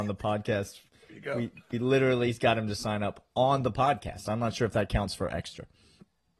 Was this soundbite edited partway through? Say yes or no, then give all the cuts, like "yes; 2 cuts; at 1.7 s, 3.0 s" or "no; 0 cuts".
no; 0 cuts